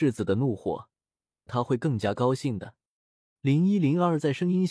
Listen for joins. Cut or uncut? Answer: cut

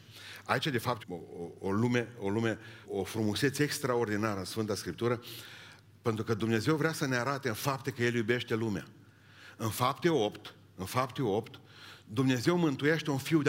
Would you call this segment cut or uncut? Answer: cut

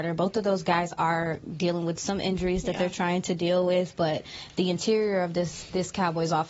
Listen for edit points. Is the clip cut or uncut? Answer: uncut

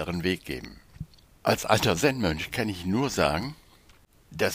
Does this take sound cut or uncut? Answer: cut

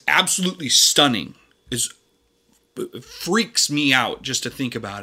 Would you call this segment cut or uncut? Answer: uncut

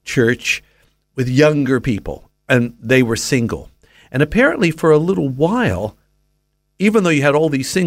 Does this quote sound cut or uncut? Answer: uncut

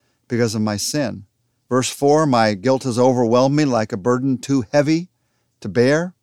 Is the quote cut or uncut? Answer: uncut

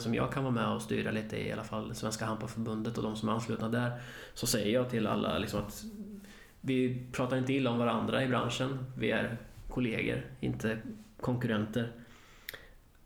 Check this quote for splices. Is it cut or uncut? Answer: uncut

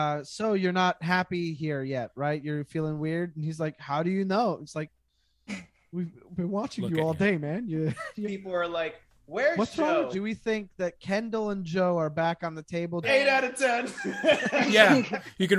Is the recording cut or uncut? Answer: cut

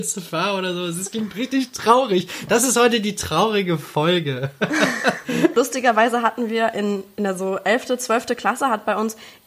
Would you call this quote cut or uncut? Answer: uncut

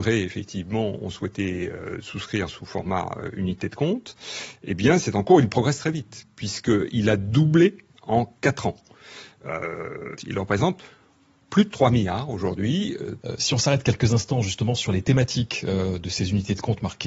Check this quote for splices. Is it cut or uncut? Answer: cut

